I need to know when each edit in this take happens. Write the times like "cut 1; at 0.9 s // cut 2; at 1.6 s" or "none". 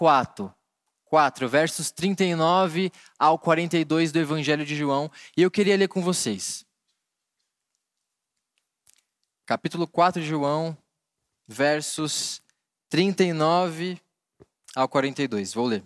none